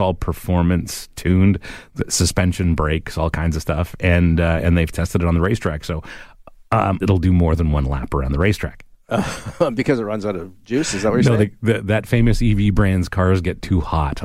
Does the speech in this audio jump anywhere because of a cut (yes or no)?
yes